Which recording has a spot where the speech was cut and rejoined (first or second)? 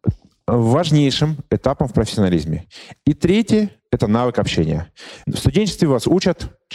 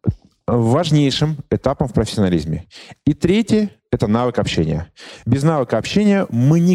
first